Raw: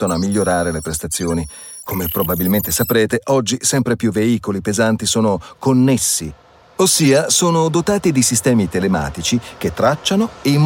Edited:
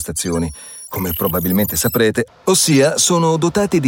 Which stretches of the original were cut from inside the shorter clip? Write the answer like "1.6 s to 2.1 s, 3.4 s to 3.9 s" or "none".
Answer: 3.2 s to 6.6 s